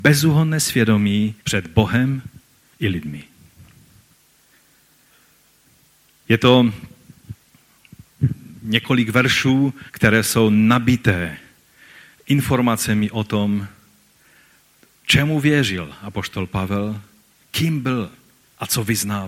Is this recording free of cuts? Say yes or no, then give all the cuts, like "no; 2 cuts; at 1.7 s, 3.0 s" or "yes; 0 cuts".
no; 2 cuts; at 1.4 s, 9.9 s